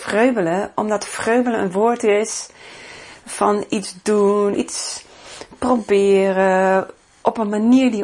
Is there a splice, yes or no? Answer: yes